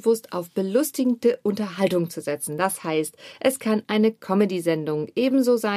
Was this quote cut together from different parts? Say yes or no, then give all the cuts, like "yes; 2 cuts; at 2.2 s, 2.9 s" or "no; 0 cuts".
no; 0 cuts